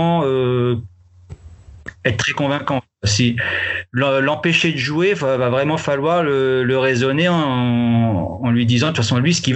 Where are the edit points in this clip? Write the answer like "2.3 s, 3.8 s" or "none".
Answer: none